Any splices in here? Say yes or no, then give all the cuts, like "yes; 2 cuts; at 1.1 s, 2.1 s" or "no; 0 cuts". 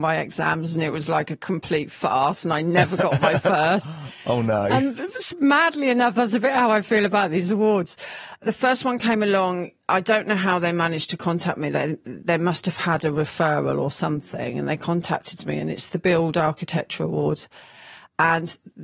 no; 0 cuts